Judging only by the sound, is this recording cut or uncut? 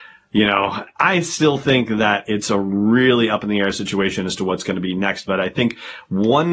uncut